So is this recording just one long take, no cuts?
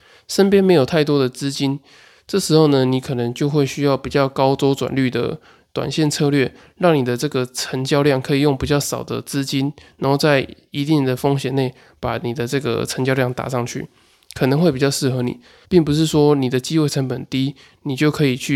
no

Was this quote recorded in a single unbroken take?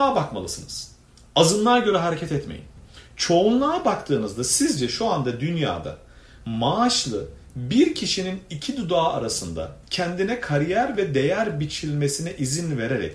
yes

